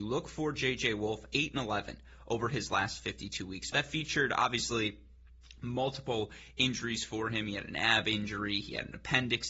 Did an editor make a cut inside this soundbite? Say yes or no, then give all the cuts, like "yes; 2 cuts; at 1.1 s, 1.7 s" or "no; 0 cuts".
yes; 1 cut; at 3.7 s